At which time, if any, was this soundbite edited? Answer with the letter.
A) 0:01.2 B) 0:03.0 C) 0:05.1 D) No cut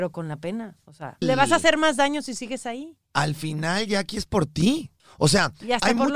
A